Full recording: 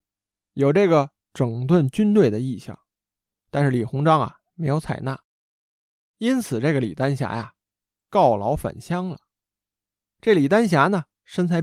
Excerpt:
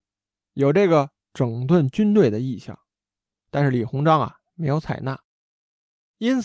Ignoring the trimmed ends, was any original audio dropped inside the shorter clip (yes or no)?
no